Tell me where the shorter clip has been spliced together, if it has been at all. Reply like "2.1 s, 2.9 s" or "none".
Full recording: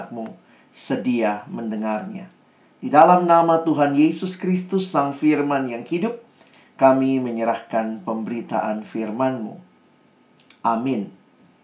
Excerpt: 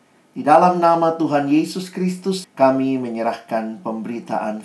2.4 s